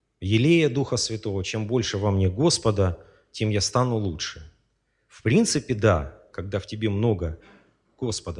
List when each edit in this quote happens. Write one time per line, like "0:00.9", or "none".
0:06.3